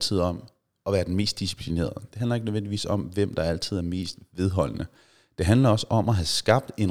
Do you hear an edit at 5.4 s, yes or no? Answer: no